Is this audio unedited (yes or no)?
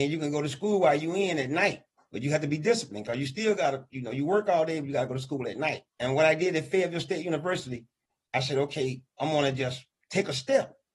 no